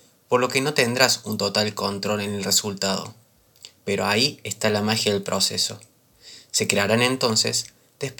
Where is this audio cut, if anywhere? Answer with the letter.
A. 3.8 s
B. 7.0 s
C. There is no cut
A